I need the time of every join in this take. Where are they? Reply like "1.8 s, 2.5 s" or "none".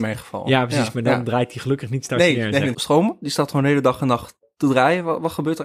2.7 s